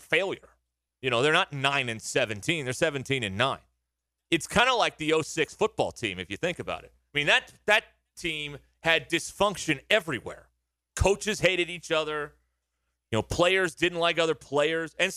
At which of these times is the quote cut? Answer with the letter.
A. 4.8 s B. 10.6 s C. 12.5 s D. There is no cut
D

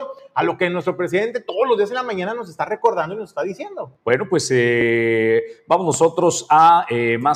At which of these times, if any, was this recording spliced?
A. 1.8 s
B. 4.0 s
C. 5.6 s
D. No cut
B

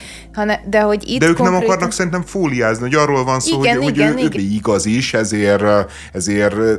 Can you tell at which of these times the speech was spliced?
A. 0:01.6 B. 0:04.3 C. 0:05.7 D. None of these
B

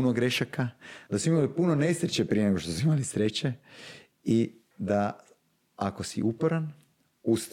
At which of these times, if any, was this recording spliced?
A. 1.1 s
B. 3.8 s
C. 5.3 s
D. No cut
A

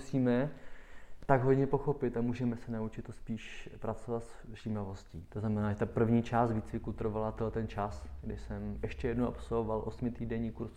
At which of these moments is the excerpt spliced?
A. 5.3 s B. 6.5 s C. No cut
A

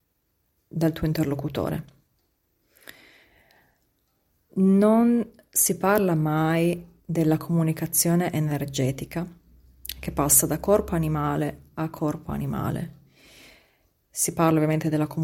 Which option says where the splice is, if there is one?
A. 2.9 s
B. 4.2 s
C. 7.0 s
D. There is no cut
C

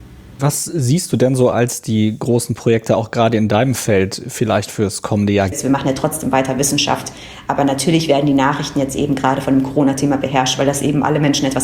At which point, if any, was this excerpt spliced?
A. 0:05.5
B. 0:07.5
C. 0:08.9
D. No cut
A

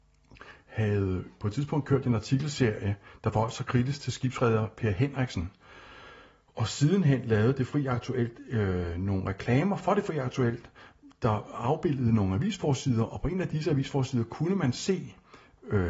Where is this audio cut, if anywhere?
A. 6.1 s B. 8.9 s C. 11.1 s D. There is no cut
D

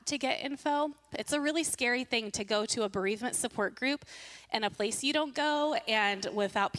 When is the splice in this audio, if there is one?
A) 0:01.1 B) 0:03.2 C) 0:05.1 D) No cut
A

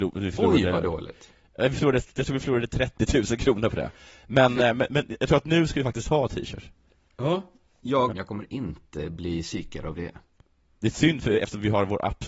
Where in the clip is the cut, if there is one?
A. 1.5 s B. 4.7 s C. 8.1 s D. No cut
C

